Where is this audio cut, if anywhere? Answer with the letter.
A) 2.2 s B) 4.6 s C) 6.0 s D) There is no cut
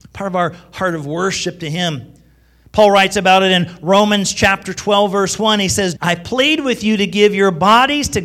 C